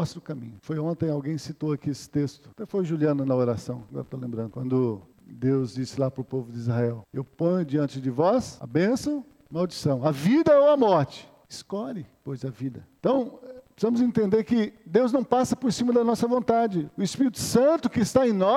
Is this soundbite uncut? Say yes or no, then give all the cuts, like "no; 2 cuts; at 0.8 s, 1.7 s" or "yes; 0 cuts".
yes; 0 cuts